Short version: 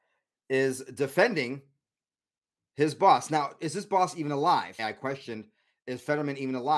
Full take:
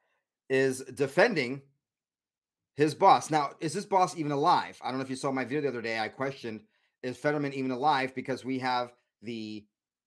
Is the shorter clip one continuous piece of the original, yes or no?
no